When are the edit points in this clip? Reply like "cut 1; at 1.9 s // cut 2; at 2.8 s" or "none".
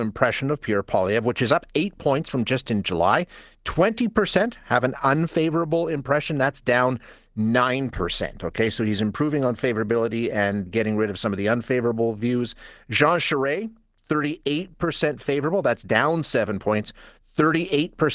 cut 1; at 10.7 s

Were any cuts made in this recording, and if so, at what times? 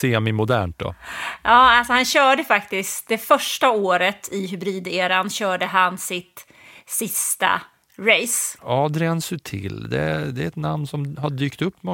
cut 1; at 3.1 s // cut 2; at 8.6 s

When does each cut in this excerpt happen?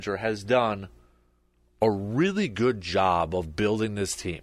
none

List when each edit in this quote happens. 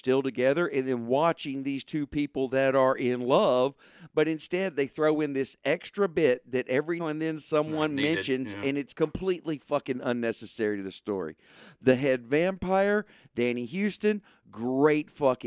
cut 1; at 7.0 s

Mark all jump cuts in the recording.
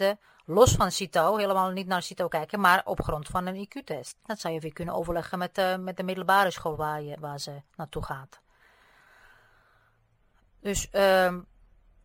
cut 1; at 4.2 s

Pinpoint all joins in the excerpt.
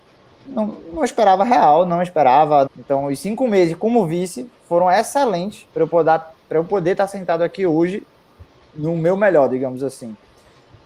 cut 1; at 2.7 s // cut 2; at 5.7 s

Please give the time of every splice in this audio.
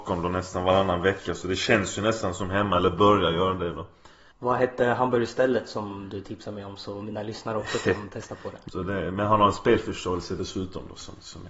cut 1; at 4.3 s // cut 2; at 8.7 s

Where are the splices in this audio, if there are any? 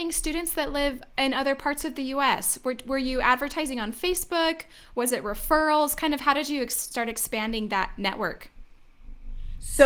none

